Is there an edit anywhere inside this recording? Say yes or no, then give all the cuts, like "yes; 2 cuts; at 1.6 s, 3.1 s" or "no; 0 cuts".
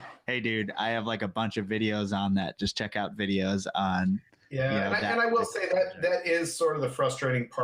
no; 0 cuts